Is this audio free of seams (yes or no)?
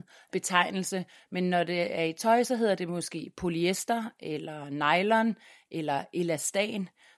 yes